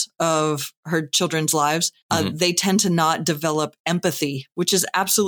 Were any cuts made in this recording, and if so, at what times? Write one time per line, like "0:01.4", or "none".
0:02.0